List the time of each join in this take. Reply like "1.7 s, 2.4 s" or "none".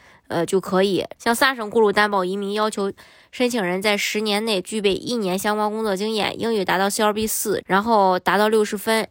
1.2 s, 7.6 s